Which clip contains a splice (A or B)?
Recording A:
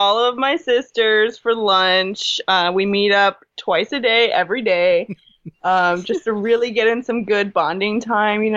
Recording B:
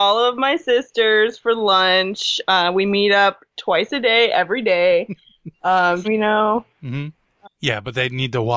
B